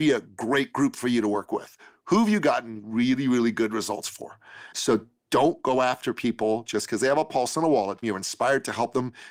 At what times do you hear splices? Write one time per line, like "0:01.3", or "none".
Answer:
0:04.7
0:08.0